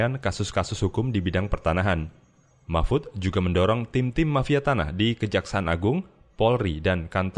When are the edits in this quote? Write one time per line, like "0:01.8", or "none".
none